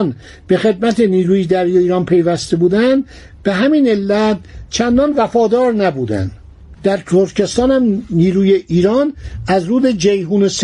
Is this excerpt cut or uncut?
cut